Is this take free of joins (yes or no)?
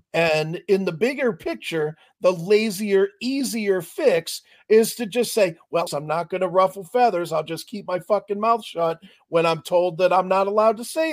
no